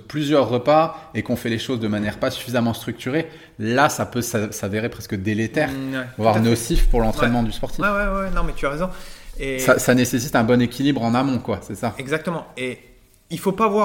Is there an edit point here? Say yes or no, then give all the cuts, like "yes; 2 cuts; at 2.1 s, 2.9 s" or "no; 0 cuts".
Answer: no; 0 cuts